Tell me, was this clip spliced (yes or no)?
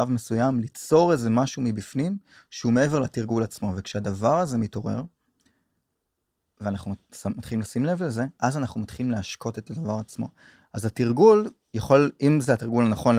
no